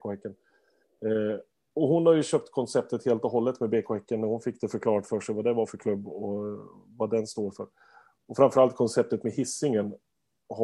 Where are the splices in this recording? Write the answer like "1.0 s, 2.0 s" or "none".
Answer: none